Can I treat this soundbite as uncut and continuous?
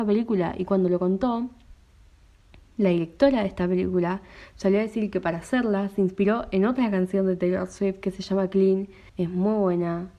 no; 1 cut; at 9.1 s

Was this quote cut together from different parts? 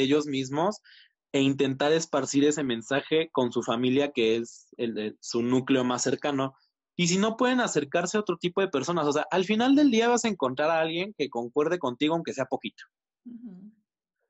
no; 0 cuts

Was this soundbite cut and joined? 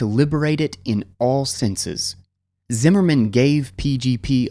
yes; 1 cut; at 2.6 s

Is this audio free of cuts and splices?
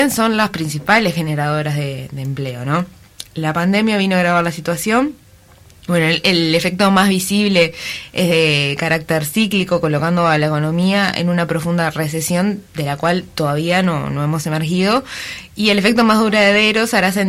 yes; 0 cuts

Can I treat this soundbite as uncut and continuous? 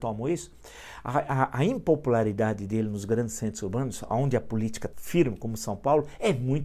no; 1 cut; at 4.9 s

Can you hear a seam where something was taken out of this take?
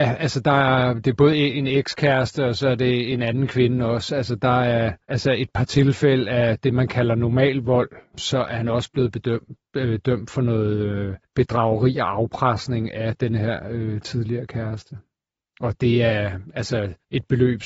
yes; 1 cut; at 5.0 s

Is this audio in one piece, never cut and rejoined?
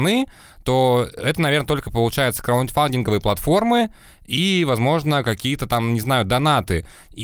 yes; 0 cuts

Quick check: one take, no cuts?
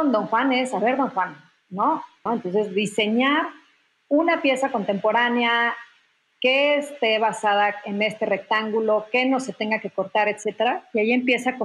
no; 1 cut; at 2.3 s

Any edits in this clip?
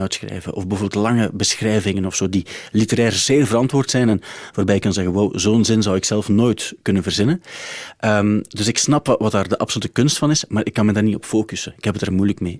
no; 0 cuts

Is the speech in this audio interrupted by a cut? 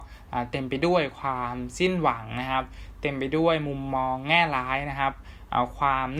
no; 0 cuts

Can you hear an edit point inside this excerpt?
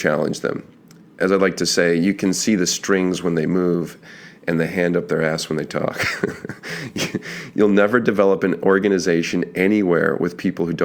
no; 0 cuts

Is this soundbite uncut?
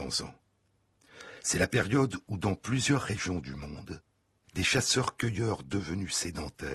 yes; 0 cuts

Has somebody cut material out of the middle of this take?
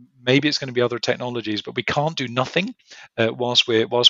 no; 0 cuts

